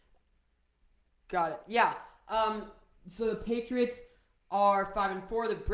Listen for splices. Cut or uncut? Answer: cut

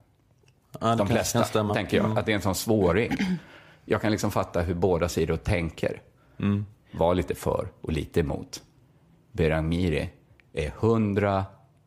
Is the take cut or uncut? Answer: uncut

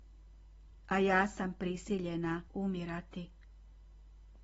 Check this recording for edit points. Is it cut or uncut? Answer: cut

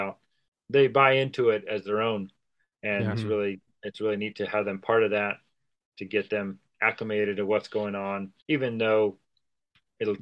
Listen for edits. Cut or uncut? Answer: cut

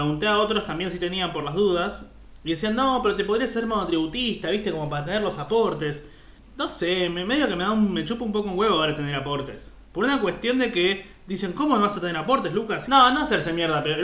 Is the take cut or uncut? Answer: cut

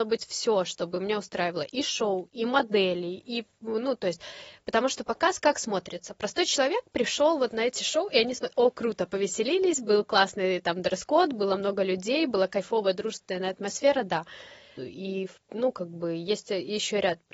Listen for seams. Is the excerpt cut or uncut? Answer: cut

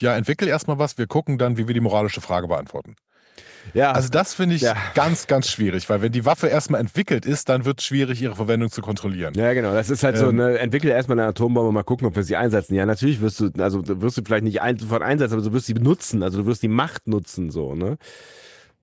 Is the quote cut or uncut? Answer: uncut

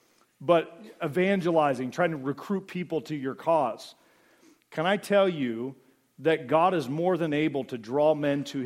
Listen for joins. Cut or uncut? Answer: uncut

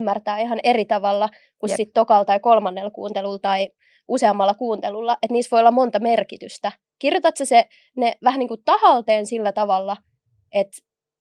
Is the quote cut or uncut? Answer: uncut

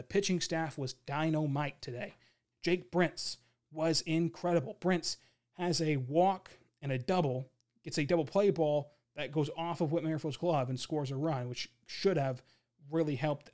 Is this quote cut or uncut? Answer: cut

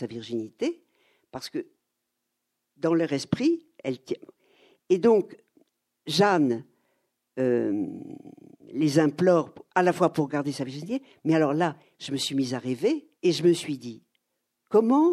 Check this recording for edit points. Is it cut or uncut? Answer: cut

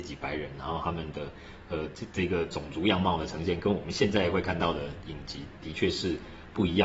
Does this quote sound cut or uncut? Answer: uncut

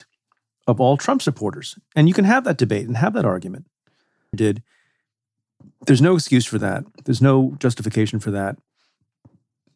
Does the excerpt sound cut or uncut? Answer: cut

